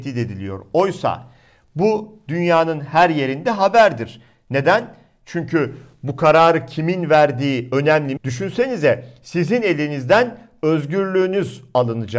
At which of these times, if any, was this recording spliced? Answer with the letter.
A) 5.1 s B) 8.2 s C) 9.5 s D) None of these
B